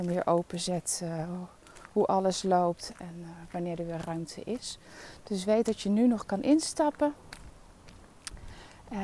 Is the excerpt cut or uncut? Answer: uncut